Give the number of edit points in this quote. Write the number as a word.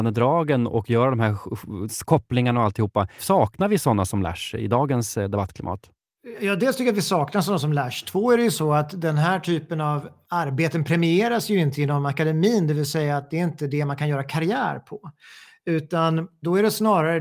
one